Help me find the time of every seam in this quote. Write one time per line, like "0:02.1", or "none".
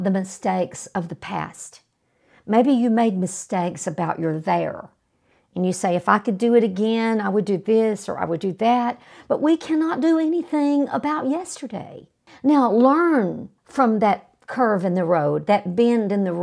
0:12.3
0:13.6